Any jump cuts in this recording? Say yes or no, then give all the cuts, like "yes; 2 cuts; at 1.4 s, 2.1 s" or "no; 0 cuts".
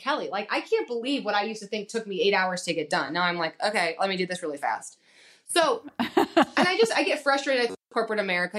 no; 0 cuts